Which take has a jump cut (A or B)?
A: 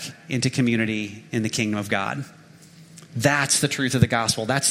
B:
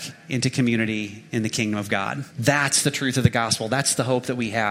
B